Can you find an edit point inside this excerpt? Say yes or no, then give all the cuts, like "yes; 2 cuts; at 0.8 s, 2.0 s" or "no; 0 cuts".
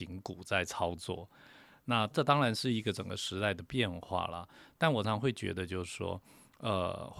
yes; 1 cut; at 5.0 s